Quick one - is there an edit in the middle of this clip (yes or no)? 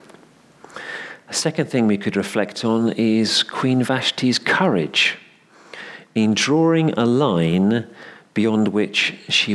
no